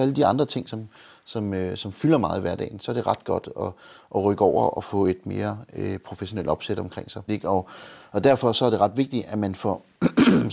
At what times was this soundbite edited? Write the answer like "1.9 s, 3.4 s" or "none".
7.3 s